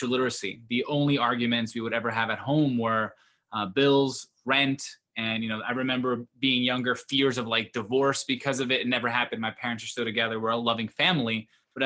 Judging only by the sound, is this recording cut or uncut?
uncut